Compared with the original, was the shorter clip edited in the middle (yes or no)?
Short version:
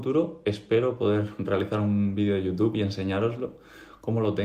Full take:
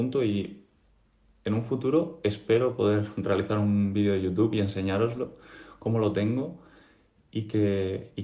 no